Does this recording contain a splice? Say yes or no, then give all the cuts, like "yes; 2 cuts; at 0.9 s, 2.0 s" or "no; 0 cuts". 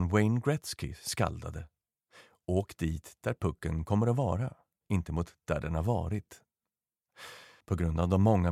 yes; 1 cut; at 7.6 s